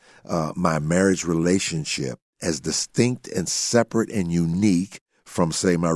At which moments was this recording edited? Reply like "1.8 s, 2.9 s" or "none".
none

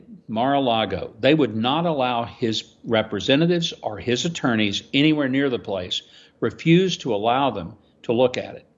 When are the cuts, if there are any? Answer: none

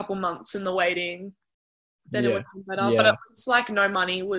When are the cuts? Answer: none

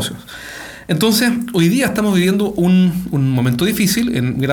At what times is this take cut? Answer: none

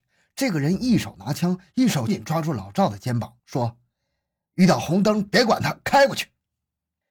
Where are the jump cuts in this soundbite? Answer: 2.1 s

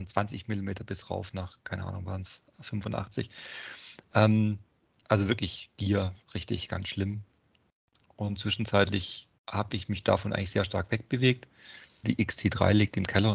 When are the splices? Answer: 9.4 s, 12.0 s

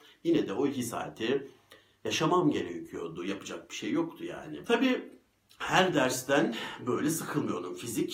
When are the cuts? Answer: 3.2 s, 4.6 s

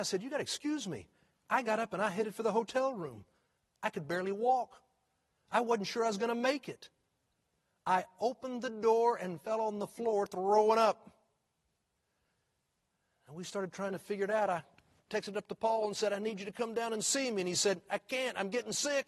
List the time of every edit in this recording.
none

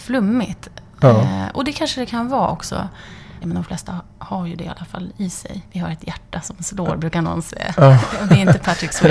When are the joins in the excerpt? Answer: 3.4 s

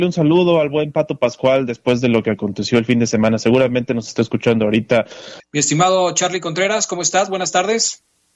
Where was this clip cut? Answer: 5.4 s

